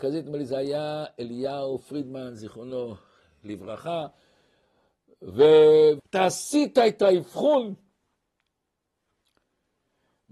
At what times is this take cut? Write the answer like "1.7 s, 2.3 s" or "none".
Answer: 6.0 s